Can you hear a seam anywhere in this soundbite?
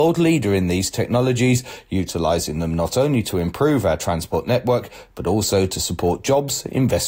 no; 0 cuts

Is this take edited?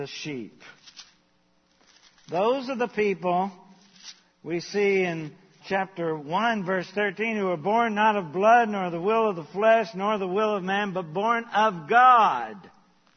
yes; 1 cut; at 5.6 s

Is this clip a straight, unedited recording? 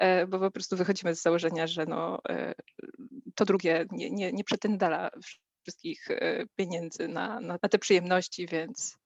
no; 1 cut; at 7.6 s

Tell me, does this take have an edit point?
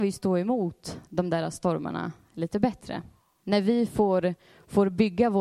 yes; 1 cut; at 3.4 s

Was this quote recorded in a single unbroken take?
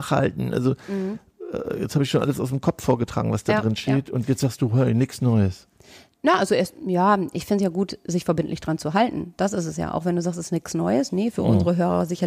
yes; 0 cuts

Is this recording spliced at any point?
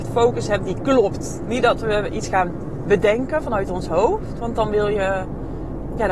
no; 0 cuts

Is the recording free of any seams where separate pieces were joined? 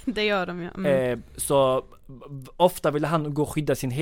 yes; 0 cuts

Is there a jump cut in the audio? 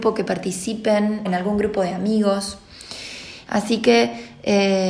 yes; 2 cuts; at 1.2 s, 3.4 s

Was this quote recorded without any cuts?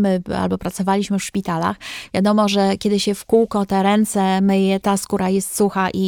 yes; 0 cuts

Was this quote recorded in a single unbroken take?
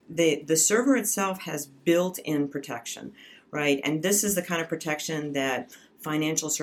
yes; 0 cuts

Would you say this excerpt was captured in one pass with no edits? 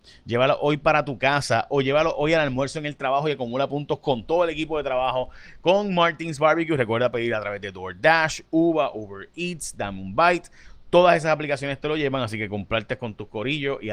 yes; 0 cuts

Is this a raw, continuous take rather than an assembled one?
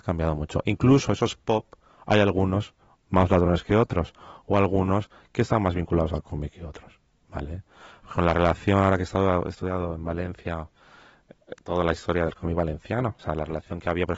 yes; 0 cuts

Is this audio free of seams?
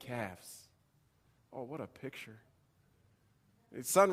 yes; 0 cuts

